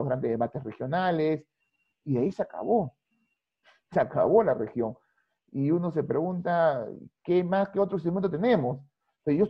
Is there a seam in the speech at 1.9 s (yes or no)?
no